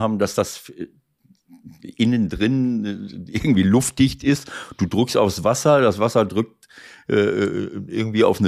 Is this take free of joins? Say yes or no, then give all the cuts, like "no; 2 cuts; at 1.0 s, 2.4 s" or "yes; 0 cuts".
yes; 0 cuts